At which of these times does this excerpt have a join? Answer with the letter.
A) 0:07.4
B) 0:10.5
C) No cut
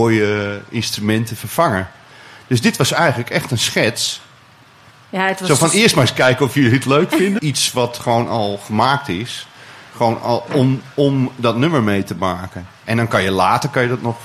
A